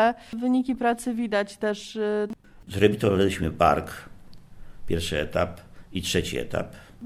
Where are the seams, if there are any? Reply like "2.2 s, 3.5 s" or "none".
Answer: 2.7 s